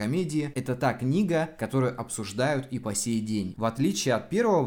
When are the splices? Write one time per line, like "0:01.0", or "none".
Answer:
0:03.5